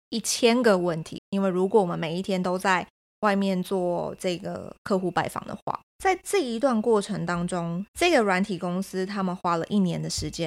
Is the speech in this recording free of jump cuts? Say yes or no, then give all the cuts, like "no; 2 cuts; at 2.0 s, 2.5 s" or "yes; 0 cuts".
no; 3 cuts; at 1.2 s, 5.9 s, 7.9 s